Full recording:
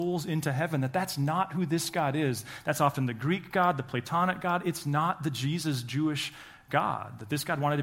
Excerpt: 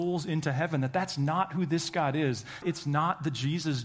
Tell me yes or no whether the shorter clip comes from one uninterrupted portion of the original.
no